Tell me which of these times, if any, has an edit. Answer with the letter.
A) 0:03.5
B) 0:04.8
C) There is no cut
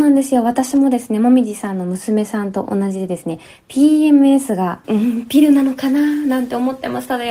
B